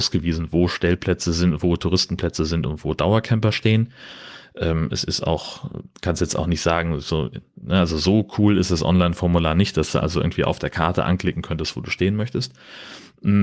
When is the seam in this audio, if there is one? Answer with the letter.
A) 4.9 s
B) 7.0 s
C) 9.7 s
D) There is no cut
D